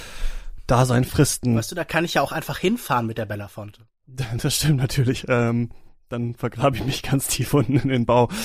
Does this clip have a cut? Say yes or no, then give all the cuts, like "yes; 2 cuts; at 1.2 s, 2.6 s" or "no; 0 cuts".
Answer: no; 0 cuts